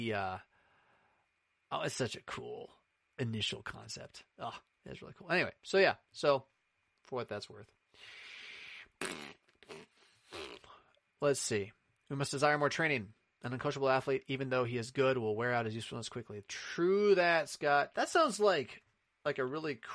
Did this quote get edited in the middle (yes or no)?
yes